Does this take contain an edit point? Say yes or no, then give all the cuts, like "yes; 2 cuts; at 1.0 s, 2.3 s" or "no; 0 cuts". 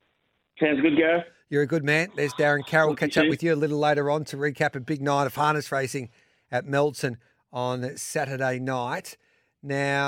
no; 0 cuts